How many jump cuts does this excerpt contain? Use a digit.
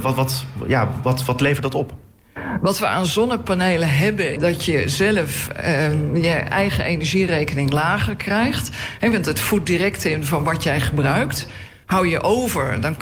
1